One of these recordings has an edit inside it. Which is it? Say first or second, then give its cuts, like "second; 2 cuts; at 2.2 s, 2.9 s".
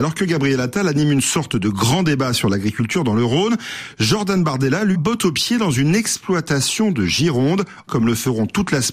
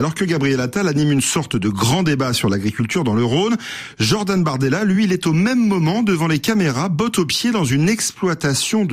first; 2 cuts; at 4.9 s, 7.9 s